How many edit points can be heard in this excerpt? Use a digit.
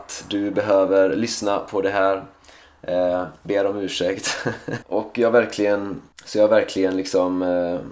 2